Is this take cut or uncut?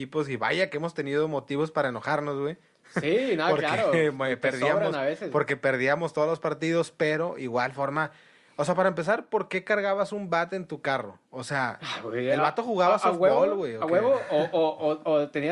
uncut